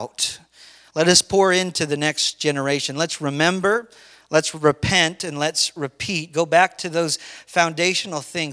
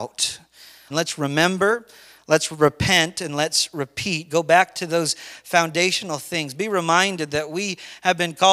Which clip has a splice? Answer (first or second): second